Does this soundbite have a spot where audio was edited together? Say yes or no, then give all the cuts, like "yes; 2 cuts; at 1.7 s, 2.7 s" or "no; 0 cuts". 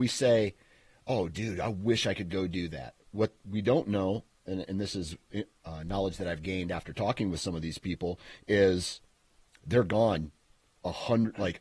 no; 0 cuts